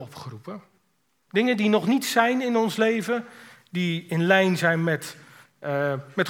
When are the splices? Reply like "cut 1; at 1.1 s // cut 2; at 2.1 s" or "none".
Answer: cut 1; at 1.3 s